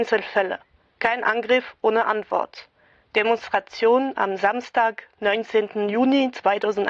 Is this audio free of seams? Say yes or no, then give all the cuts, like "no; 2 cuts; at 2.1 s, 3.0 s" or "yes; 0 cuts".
yes; 0 cuts